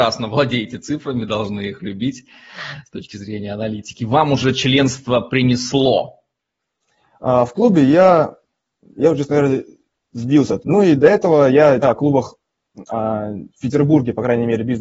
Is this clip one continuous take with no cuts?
no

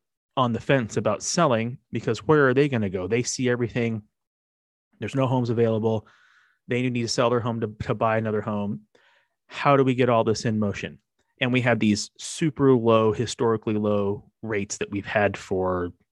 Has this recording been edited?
no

